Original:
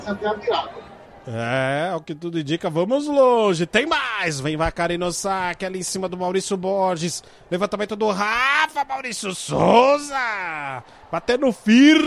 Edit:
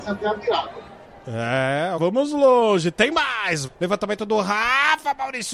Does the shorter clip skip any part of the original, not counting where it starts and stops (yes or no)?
yes